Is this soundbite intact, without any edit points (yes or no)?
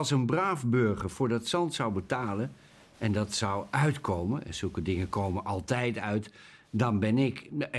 yes